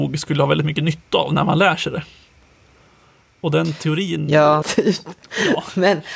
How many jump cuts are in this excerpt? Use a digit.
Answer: 1